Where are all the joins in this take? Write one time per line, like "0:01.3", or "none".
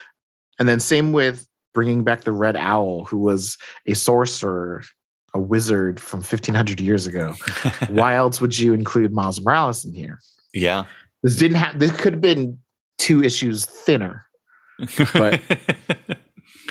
0:07.9